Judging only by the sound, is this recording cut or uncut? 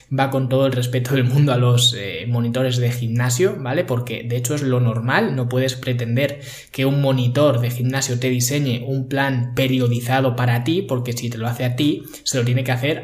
uncut